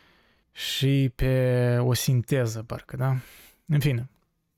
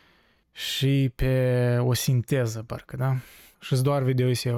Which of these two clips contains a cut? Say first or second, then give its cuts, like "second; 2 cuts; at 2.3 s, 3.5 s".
second; 1 cut; at 3.5 s